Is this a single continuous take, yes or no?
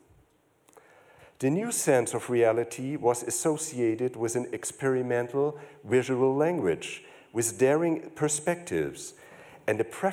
yes